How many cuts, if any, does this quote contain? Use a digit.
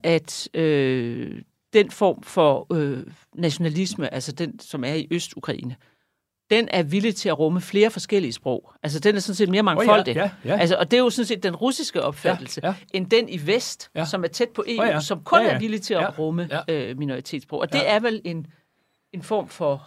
1